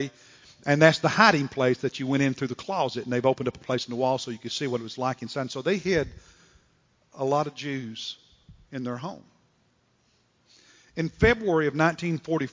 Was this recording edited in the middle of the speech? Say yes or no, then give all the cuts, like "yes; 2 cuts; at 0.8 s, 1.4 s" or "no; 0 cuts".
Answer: no; 0 cuts